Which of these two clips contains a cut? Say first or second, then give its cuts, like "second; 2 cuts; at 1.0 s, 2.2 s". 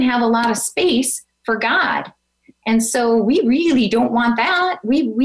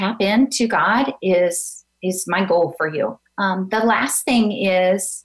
second; 1 cut; at 3.3 s